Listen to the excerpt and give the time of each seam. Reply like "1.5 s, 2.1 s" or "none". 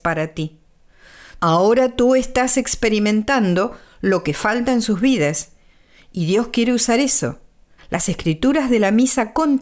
1.4 s, 7.8 s